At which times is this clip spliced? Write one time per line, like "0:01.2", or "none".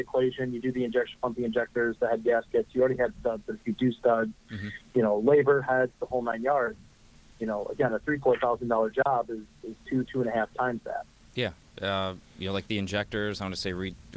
none